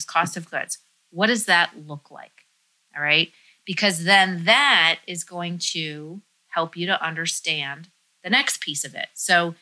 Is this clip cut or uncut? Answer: uncut